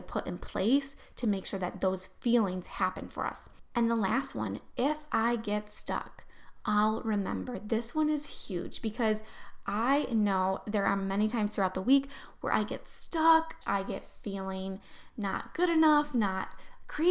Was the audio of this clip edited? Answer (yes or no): yes